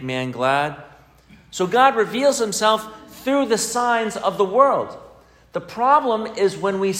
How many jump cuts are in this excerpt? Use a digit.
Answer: 0